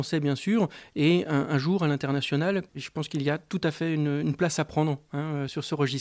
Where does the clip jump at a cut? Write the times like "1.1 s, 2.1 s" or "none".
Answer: none